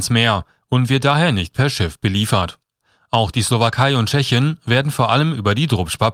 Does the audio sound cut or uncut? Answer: uncut